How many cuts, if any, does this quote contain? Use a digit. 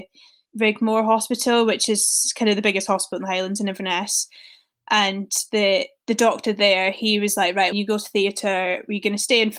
1